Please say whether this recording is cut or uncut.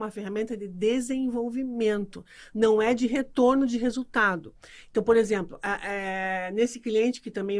uncut